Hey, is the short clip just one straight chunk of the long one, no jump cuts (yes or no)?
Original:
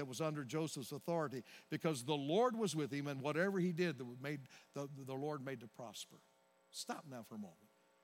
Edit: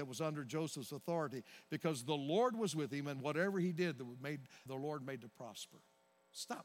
no